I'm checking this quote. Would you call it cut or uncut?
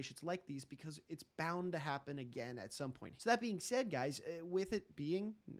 cut